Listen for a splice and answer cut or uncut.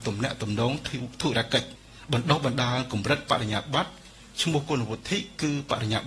uncut